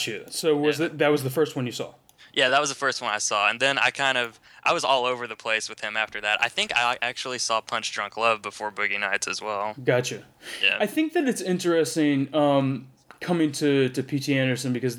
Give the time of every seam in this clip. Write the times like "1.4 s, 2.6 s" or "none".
none